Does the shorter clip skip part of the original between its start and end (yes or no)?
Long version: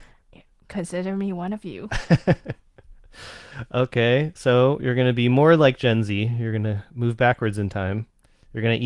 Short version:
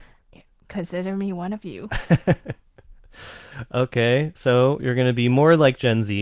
no